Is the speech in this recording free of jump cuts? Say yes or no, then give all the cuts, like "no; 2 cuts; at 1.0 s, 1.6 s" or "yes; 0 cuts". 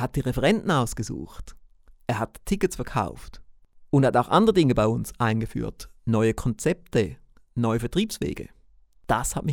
yes; 0 cuts